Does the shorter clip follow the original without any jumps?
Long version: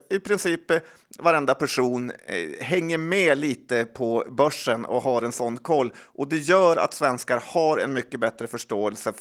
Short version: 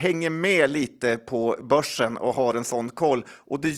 yes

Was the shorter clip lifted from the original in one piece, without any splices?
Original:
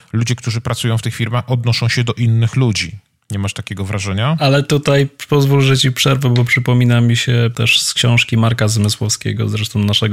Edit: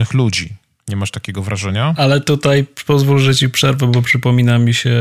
yes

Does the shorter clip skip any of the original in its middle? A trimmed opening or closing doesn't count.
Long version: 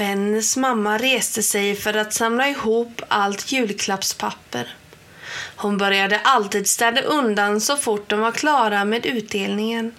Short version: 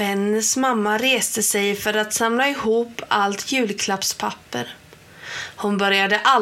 no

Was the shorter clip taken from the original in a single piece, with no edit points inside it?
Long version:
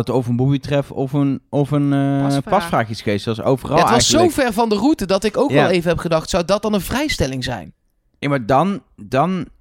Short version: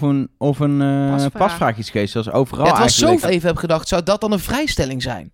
no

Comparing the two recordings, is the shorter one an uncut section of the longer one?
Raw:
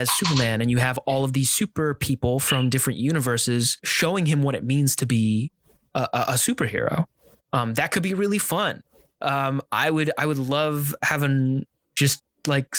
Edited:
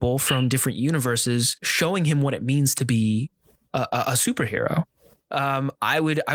no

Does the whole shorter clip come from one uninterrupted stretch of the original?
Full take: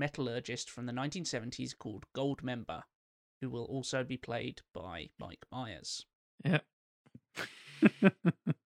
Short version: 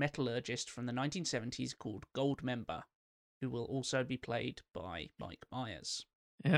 yes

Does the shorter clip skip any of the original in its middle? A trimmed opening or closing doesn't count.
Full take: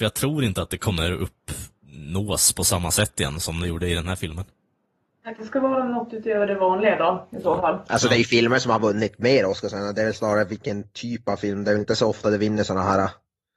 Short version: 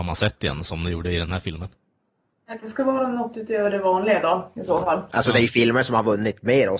no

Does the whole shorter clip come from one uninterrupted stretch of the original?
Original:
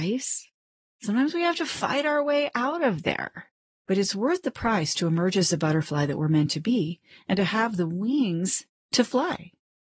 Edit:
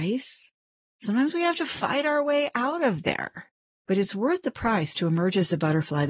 yes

